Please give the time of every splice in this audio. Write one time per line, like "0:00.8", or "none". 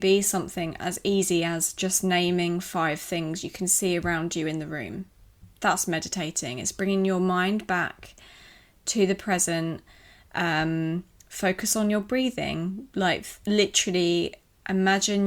none